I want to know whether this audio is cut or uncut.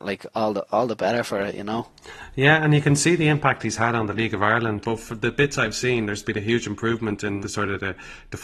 cut